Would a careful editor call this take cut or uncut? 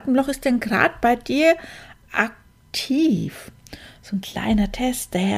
uncut